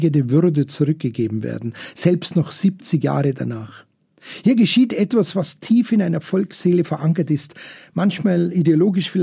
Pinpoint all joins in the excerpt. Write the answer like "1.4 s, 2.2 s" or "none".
none

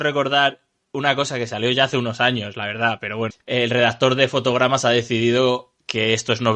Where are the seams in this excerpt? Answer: 3.3 s

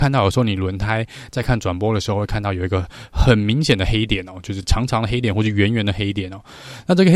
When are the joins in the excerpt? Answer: none

